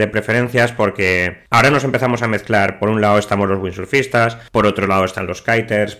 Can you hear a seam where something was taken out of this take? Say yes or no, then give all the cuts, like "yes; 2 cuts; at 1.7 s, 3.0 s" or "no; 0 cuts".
no; 0 cuts